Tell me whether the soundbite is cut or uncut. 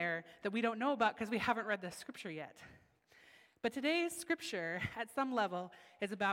uncut